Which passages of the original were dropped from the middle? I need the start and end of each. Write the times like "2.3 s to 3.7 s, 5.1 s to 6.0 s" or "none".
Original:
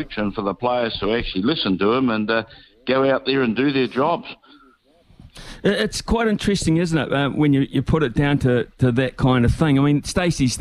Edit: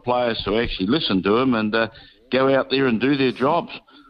none